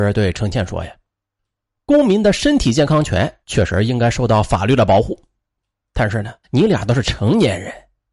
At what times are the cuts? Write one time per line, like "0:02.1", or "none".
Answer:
0:03.4
0:06.4

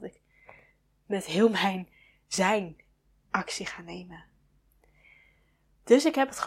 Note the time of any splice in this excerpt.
none

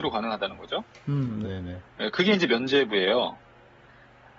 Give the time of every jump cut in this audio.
0:01.4

